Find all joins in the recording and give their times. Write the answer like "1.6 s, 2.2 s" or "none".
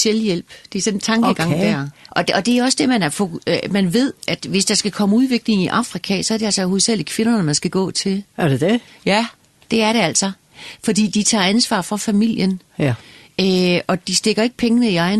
2.1 s